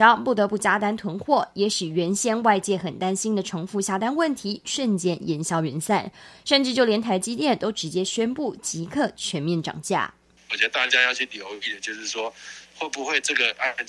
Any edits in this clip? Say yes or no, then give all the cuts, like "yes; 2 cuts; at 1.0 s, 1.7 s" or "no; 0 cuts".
no; 0 cuts